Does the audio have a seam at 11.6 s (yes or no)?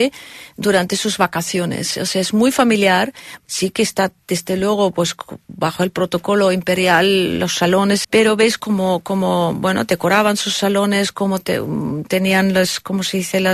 no